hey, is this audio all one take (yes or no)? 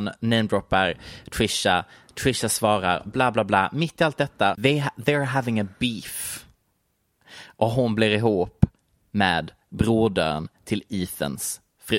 no